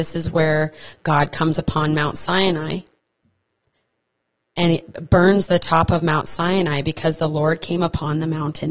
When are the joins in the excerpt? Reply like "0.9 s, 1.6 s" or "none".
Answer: none

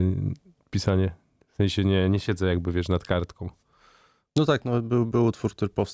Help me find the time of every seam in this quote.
none

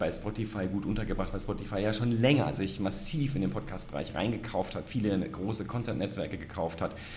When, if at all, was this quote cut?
none

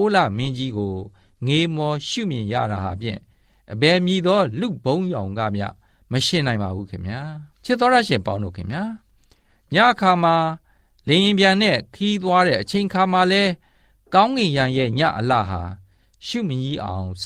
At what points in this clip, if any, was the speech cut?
7.5 s

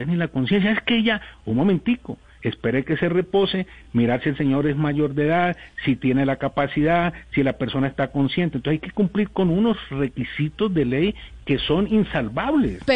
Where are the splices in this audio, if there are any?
none

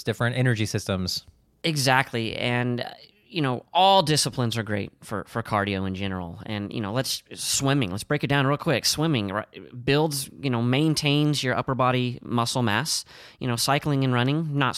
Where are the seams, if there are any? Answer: none

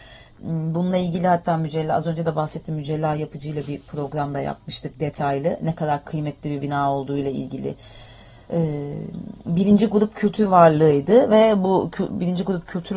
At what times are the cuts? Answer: none

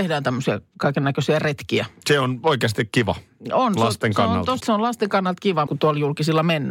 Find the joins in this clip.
4.6 s, 5.7 s

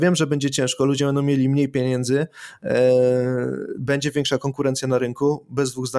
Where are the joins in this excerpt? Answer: none

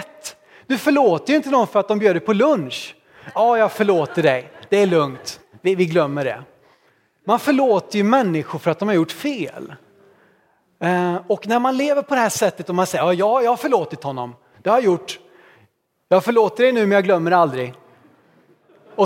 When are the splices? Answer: 5.5 s

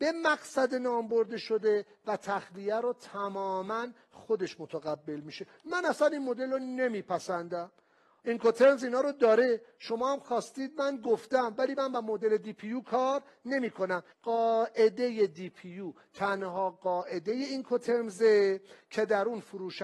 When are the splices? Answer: 14.1 s

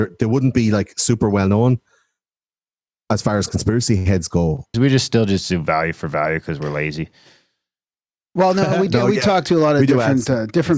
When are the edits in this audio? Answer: 4.7 s

